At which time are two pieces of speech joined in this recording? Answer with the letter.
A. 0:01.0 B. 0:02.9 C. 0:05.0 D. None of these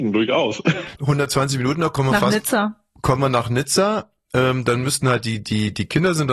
A